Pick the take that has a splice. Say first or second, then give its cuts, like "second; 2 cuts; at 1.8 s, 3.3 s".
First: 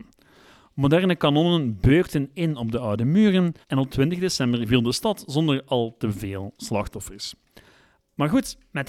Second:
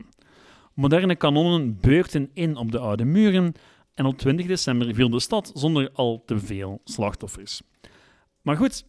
first; 1 cut; at 3.6 s